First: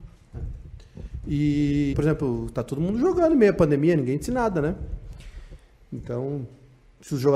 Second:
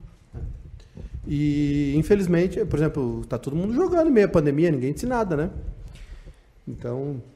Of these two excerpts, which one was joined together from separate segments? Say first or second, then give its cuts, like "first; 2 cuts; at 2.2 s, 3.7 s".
first; 1 cut; at 1.9 s